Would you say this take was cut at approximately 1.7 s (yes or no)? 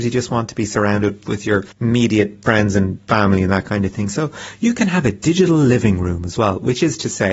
yes